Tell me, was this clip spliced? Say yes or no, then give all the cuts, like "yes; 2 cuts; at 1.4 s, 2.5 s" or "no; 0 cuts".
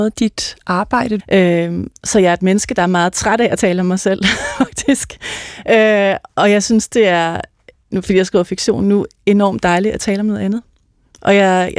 yes; 1 cut; at 1.2 s